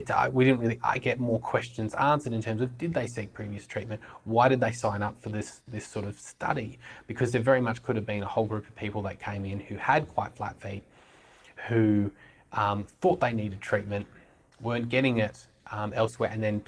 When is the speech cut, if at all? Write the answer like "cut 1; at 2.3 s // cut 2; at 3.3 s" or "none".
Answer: none